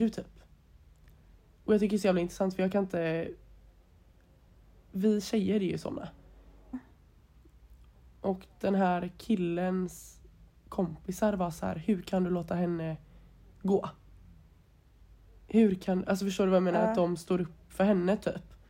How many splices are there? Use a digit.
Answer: 1